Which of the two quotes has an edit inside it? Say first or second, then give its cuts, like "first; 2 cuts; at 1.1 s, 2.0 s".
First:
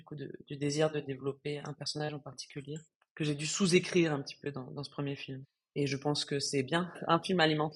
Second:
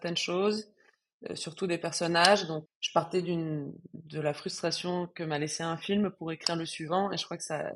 second; 1 cut; at 2.7 s